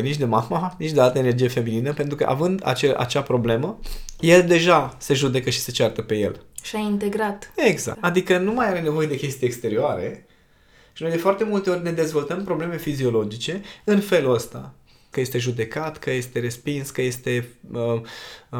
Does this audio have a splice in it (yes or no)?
yes